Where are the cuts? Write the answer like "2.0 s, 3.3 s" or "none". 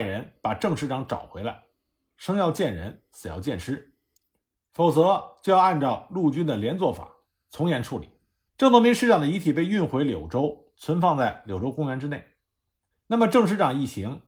8.5 s, 12.9 s